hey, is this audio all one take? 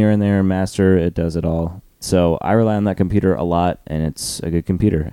no; 1 cut; at 1.9 s

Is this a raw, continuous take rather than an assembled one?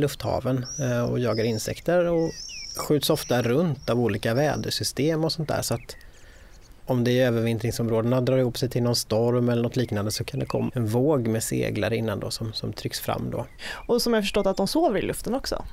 no; 1 cut; at 10.7 s

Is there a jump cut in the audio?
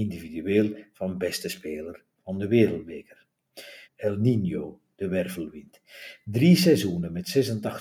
yes; 1 cut; at 3.8 s

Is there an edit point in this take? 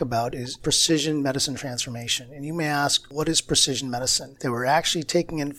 yes; 1 cut; at 4.4 s

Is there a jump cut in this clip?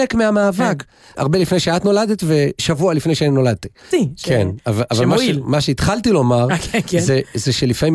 yes; 2 cuts; at 1.1 s, 3.9 s

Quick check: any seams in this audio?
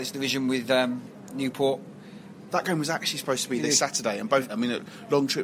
yes; 2 cuts; at 2.5 s, 4.5 s

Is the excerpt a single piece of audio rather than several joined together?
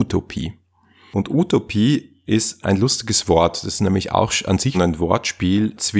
no; 2 cuts; at 2.6 s, 4.7 s

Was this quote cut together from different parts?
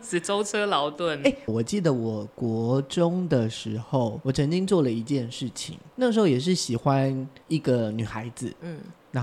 yes; 1 cut; at 1.5 s

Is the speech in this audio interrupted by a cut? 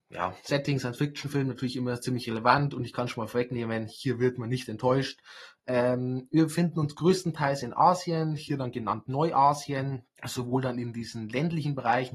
yes; 1 cut; at 10.2 s

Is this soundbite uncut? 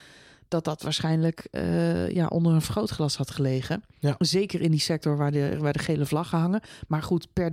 yes; 0 cuts

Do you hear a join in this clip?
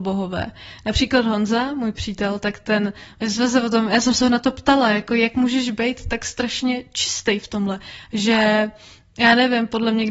no; 0 cuts

